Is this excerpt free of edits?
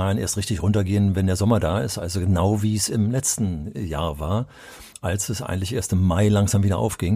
yes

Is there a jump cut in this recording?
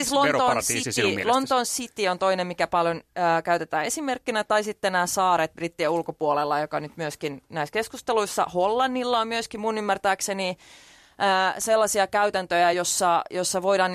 no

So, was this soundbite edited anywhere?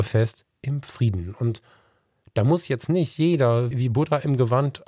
yes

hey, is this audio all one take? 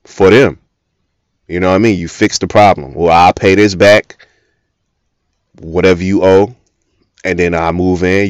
yes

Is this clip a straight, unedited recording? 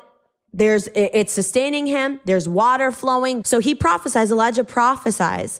no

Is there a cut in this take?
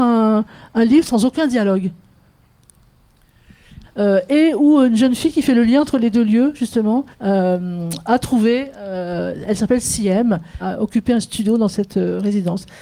yes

